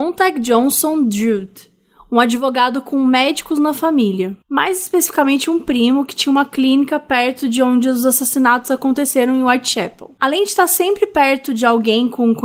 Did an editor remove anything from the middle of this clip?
no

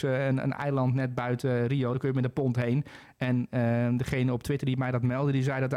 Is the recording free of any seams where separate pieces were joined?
yes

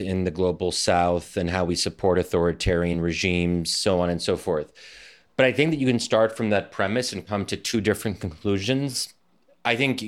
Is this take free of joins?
yes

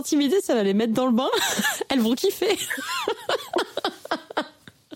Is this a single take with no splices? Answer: yes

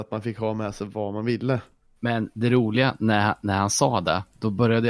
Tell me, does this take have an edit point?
no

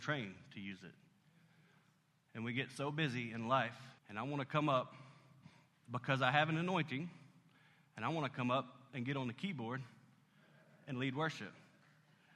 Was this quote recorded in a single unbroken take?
no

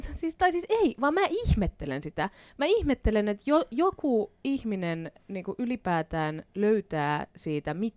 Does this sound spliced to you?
no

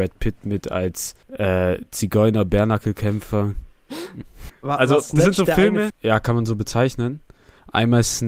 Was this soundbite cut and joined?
yes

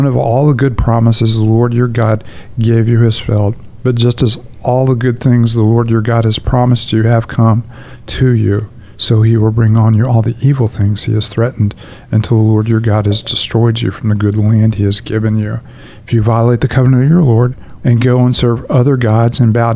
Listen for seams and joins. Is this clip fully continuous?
no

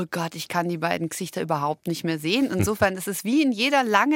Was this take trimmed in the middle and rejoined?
no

